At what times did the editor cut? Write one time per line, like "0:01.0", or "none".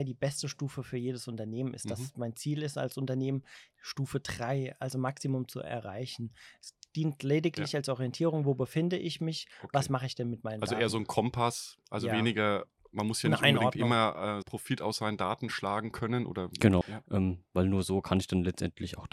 0:14.4
0:16.8